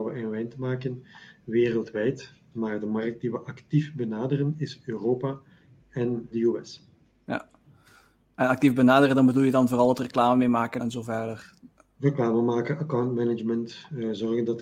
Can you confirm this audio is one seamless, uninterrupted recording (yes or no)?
no